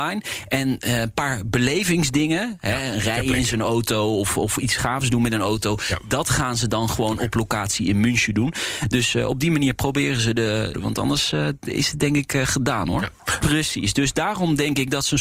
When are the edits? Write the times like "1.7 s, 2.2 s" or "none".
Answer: 10.7 s, 13.4 s